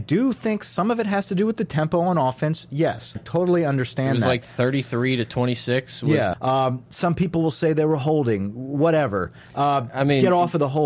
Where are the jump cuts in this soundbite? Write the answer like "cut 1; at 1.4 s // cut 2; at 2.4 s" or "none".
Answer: cut 1; at 3.2 s // cut 2; at 6.3 s